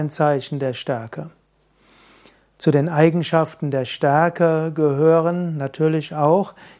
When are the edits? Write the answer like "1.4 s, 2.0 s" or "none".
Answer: none